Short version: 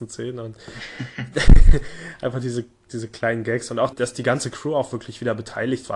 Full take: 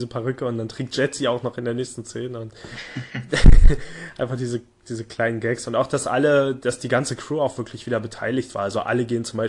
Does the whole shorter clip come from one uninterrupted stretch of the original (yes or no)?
no